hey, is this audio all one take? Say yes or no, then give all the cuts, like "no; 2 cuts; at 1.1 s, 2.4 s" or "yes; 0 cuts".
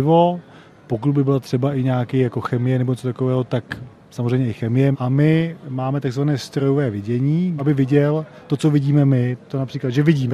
no; 2 cuts; at 4.9 s, 7.6 s